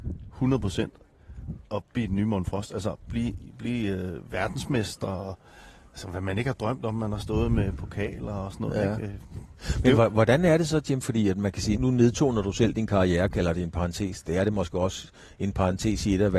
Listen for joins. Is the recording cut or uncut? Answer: cut